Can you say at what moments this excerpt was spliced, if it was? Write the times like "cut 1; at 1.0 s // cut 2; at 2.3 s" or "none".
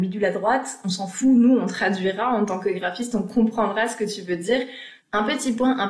cut 1; at 5.0 s